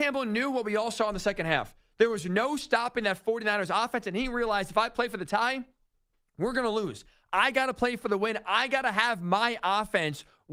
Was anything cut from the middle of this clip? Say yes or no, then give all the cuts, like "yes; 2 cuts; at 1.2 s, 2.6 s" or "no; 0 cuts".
no; 0 cuts